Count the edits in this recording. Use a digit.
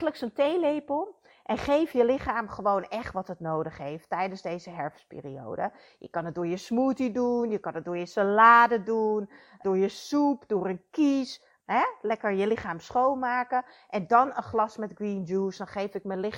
2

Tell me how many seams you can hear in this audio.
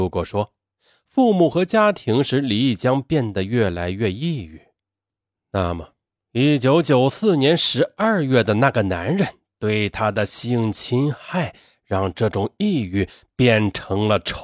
0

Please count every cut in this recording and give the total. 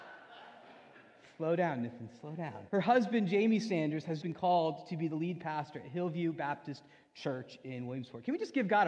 2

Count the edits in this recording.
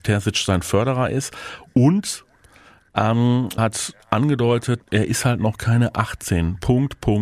2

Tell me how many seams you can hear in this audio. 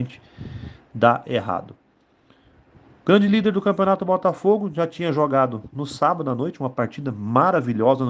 0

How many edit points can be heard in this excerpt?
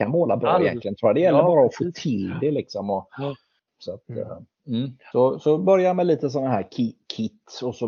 2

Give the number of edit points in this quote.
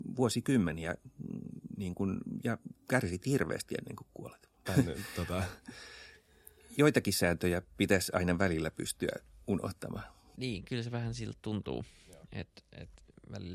1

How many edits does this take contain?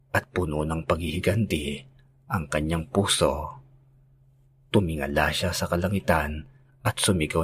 0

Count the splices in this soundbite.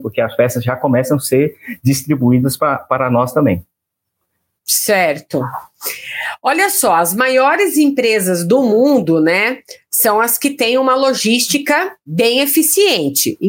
0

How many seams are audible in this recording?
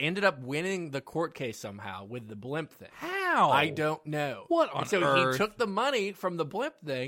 0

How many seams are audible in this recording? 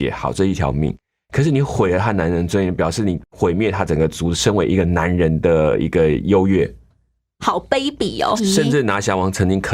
1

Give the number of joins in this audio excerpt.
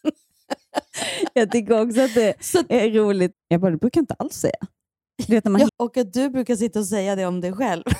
2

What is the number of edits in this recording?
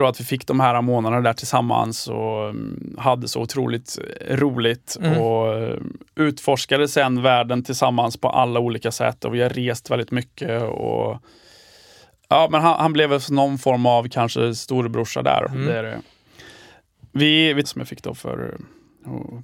2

